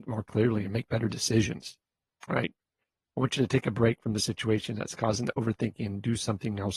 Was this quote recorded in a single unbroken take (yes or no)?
no